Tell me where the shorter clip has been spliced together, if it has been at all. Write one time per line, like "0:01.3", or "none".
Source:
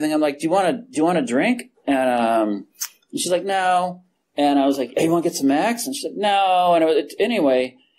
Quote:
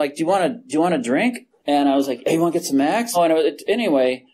0:01.6
0:03.1